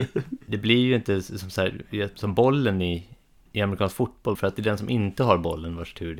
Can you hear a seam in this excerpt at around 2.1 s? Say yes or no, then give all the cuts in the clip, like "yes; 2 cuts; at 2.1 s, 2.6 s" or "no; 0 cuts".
yes; 2 cuts; at 2.1 s, 4.4 s